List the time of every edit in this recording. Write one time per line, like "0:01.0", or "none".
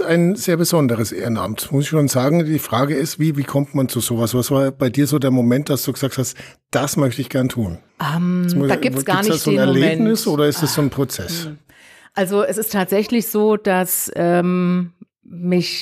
none